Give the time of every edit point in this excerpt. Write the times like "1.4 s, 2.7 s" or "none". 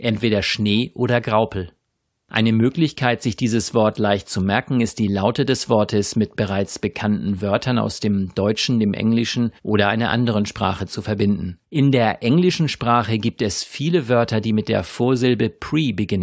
9.6 s, 11.6 s